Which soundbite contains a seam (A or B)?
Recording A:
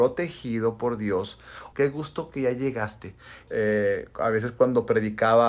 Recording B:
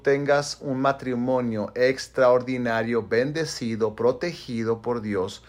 A